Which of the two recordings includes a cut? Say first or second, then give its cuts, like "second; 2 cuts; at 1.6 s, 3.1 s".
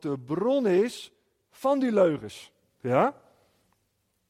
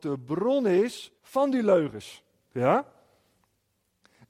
second; 1 cut; at 1.2 s